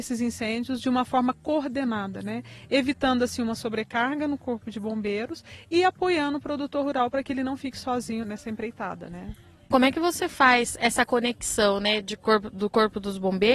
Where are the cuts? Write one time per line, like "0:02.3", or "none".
0:08.2
0:09.7